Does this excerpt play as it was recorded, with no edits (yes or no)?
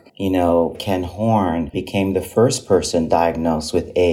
no